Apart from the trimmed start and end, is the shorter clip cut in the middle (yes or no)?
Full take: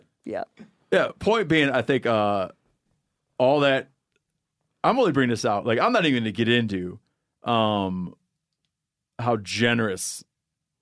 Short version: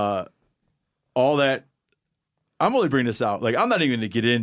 no